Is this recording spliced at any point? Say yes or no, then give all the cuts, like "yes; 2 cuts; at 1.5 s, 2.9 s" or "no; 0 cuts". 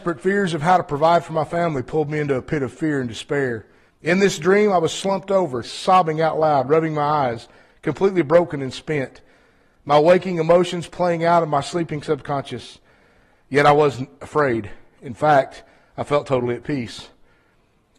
yes; 3 cuts; at 3.9 s, 5.6 s, 13.3 s